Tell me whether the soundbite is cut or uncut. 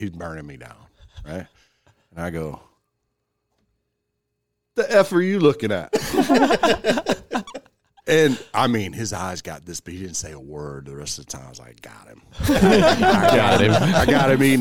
uncut